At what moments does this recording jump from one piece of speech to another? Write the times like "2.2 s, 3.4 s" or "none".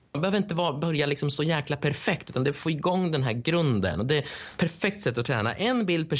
none